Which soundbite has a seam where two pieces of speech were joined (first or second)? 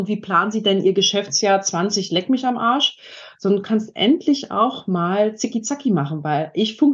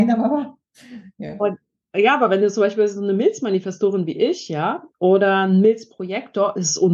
first